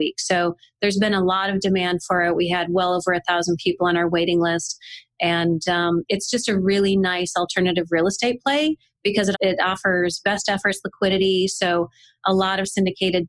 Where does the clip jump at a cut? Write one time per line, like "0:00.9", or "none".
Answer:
0:09.3